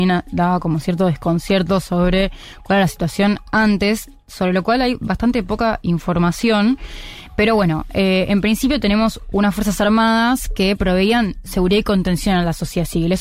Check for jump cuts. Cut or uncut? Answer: uncut